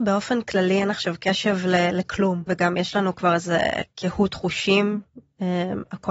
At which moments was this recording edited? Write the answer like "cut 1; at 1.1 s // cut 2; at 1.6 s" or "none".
cut 1; at 2.5 s